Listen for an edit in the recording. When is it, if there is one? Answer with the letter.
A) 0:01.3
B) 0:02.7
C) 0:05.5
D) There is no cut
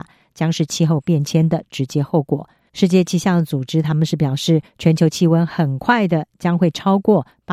B